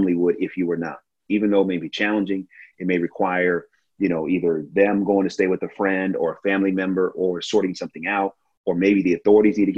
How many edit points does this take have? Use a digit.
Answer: 1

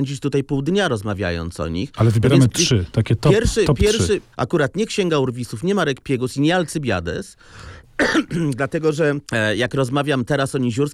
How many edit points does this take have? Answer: 1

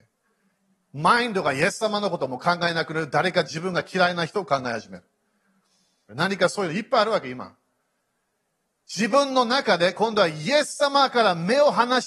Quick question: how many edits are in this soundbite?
1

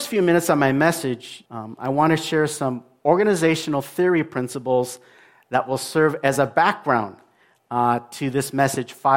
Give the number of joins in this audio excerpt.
1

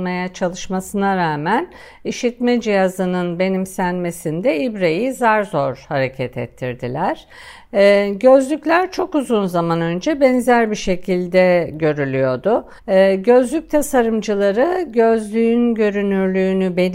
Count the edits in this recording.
1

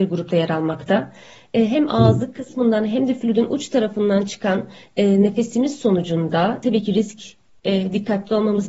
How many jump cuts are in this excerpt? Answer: 0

